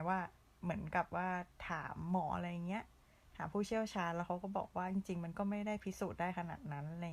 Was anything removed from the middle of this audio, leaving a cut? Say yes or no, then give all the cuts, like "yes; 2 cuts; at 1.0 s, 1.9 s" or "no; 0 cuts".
yes; 1 cut; at 2.3 s